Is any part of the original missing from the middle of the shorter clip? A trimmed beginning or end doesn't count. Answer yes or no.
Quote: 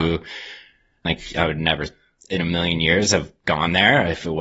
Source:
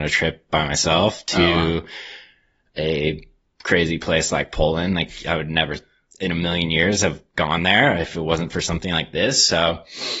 yes